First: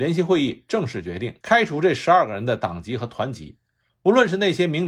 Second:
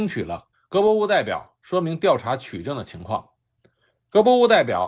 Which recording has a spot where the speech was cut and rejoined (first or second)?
first